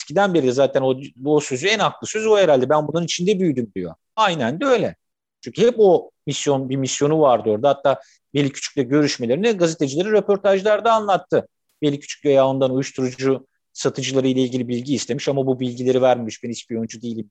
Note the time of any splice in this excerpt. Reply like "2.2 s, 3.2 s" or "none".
4.2 s